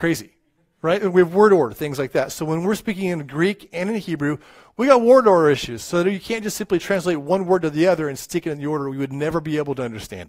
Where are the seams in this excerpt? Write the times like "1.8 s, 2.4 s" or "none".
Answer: none